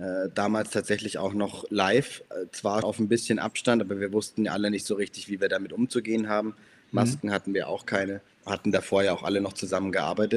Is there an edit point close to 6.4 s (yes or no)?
no